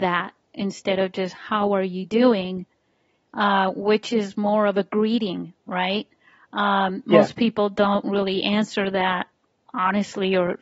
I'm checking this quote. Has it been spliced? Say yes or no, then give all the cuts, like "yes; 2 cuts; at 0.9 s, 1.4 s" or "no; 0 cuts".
no; 0 cuts